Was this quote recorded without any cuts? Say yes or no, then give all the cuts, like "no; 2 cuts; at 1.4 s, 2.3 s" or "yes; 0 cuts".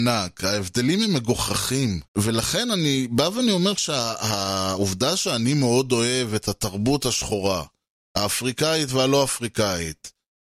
no; 1 cut; at 2.1 s